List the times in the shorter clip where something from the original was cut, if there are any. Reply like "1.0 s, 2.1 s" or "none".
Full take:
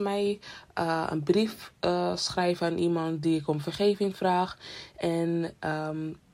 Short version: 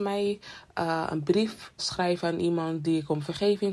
1.8 s